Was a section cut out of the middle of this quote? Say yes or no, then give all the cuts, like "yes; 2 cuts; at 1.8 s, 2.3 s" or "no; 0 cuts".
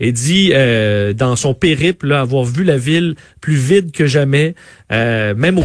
no; 0 cuts